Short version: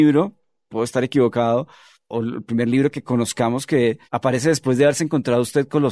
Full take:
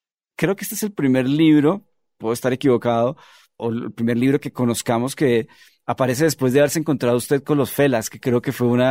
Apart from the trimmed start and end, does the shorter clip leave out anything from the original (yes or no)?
yes